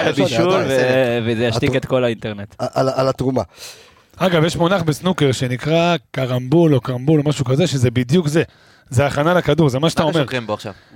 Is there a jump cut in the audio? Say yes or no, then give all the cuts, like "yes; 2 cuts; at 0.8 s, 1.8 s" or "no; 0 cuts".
no; 0 cuts